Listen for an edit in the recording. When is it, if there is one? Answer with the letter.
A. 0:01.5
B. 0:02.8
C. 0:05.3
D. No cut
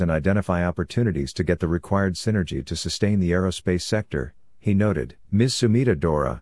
C